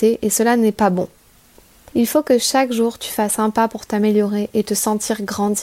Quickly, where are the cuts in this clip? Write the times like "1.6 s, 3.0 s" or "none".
1.9 s